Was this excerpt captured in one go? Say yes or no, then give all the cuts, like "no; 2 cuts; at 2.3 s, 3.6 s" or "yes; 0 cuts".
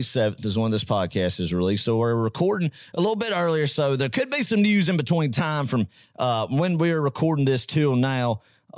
yes; 0 cuts